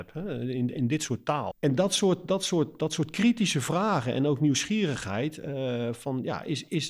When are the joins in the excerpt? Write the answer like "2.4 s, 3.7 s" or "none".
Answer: 1.5 s